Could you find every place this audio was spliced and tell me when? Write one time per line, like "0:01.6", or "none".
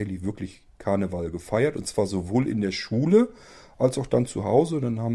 none